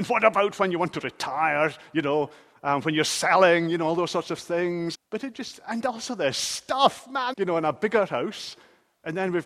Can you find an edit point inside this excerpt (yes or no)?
yes